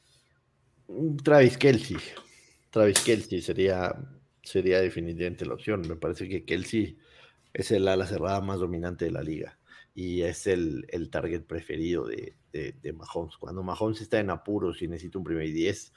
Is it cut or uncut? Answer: uncut